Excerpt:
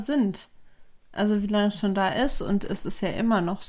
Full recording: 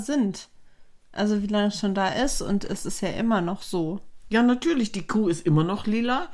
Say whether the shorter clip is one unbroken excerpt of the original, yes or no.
yes